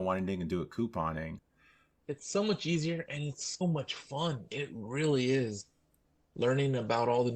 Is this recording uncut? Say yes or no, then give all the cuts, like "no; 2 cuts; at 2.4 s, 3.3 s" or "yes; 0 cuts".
no; 2 cuts; at 1.4 s, 3.6 s